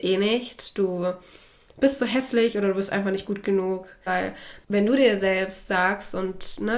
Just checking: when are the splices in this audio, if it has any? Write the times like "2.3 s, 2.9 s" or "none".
4.1 s